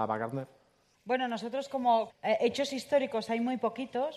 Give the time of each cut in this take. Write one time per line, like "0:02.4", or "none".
0:00.9
0:02.1